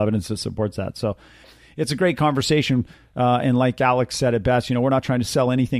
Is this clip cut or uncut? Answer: uncut